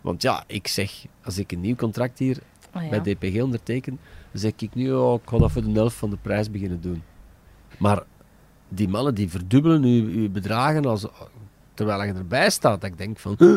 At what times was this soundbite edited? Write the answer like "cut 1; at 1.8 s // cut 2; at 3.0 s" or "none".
cut 1; at 7.7 s